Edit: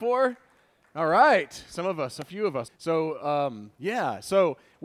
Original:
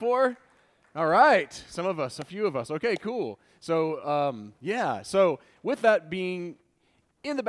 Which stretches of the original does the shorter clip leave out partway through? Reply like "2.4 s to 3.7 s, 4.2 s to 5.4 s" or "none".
2.7 s to 3.5 s